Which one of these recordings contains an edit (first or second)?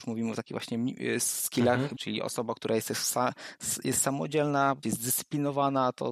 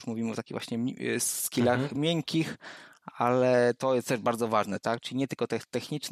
first